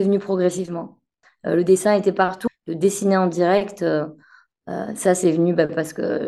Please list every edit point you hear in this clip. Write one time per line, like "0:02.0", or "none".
0:01.2
0:02.5

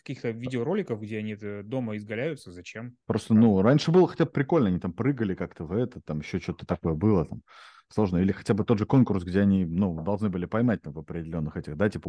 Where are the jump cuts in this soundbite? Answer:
0:03.0

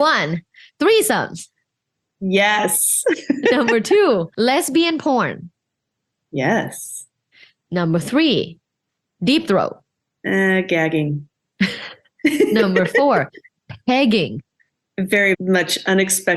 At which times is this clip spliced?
0:15.3

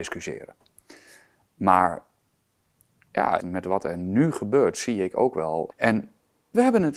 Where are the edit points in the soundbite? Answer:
0:03.4
0:05.7

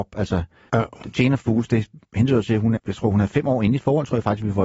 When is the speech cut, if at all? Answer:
0:02.8

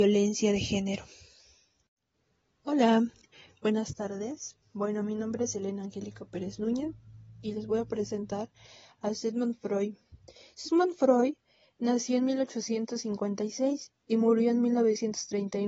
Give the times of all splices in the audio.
0:04.6

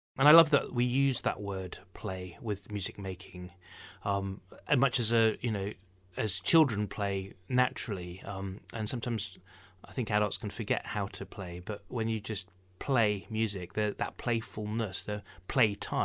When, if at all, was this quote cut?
none

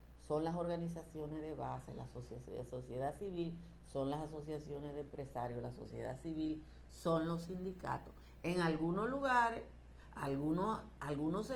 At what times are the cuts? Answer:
none

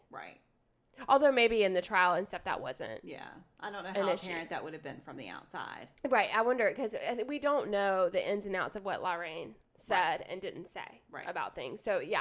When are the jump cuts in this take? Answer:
0:06.0

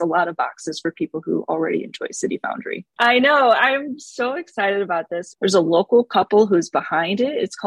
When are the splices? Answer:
0:03.0
0:05.3

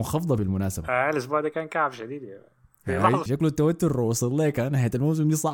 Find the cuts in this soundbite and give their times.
0:03.3

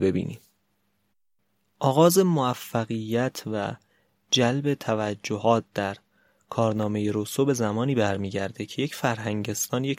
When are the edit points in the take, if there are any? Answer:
none

